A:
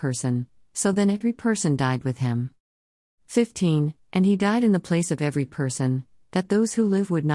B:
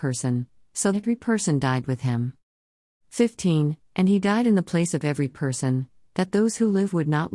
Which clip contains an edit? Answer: B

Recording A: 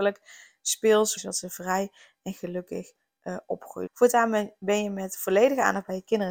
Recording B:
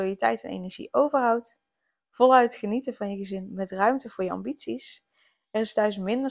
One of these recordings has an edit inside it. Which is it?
A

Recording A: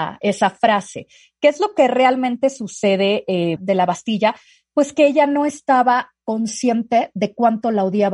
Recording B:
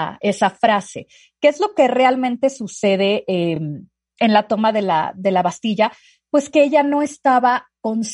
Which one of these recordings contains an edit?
A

